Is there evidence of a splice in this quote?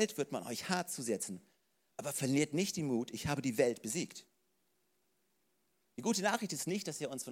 no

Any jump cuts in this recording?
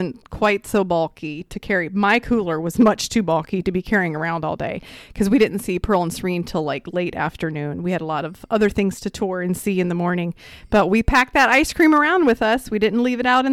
no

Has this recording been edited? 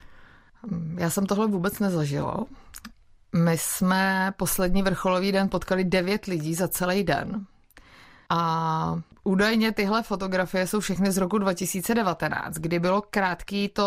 yes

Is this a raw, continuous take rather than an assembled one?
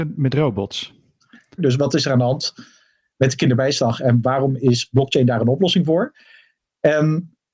no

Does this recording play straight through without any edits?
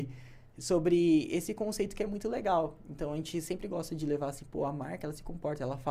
yes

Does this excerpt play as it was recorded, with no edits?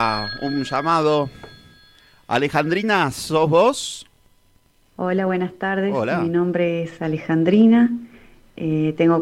yes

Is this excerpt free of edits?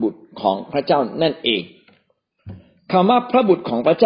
yes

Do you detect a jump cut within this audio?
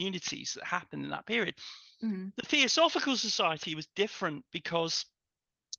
no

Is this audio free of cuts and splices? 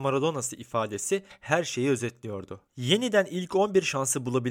no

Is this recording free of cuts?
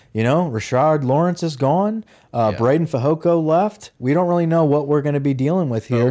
yes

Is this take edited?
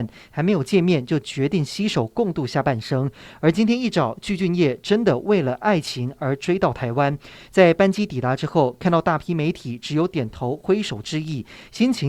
no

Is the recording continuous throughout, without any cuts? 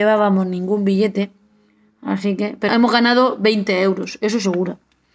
no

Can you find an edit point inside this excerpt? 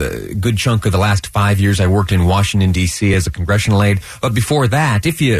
no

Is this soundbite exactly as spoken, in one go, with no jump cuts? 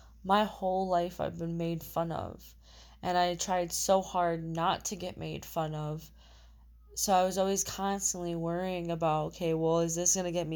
yes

